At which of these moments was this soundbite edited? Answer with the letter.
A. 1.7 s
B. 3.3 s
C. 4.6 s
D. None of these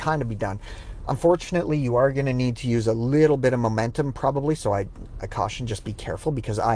D